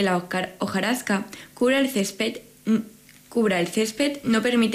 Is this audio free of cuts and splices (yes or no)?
yes